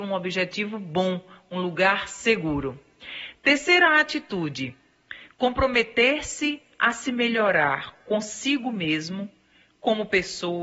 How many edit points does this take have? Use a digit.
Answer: 0